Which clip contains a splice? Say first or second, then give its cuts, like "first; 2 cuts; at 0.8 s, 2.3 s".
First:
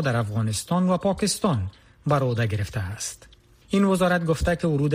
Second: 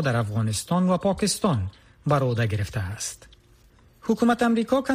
first; 1 cut; at 3.6 s